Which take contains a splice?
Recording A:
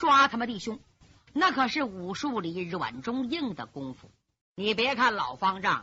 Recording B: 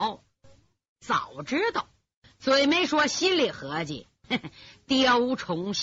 A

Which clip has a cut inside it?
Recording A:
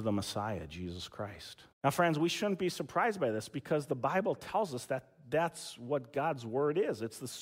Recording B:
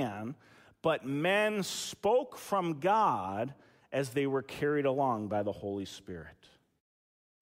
A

